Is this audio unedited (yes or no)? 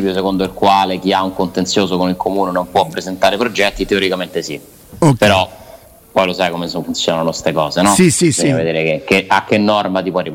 yes